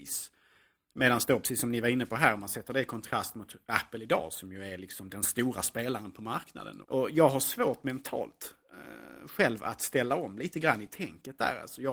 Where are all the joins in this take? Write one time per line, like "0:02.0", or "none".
0:06.8